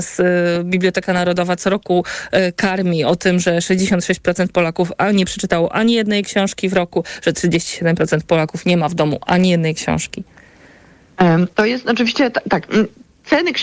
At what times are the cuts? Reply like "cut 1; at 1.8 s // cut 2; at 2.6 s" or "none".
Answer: none